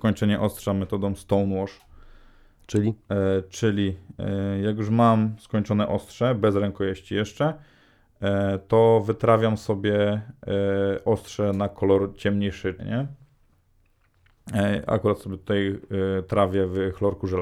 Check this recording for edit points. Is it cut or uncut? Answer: cut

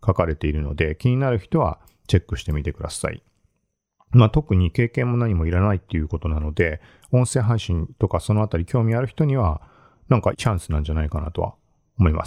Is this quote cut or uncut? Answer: cut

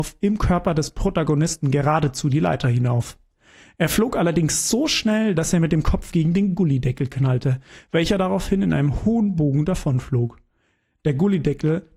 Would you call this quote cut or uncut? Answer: uncut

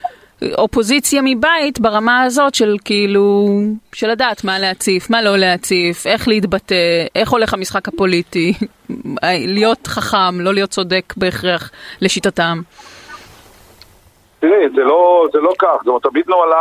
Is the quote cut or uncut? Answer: uncut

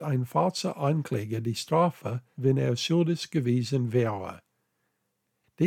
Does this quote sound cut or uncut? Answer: cut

